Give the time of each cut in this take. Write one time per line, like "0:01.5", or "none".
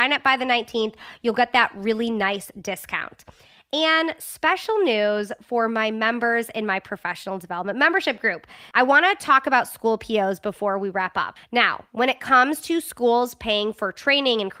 0:08.7
0:11.4